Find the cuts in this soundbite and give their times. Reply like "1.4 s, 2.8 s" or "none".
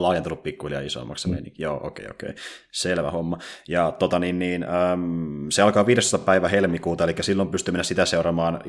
none